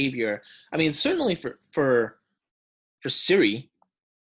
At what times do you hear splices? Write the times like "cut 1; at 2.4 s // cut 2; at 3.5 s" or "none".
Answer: none